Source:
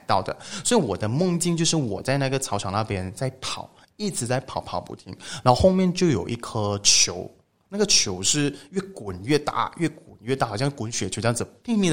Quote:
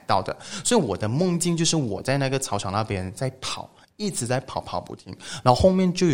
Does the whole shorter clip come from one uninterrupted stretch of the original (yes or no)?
yes